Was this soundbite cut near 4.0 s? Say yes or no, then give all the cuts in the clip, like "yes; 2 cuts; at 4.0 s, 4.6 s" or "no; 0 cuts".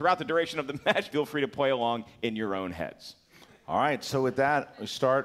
no; 1 cut; at 1.1 s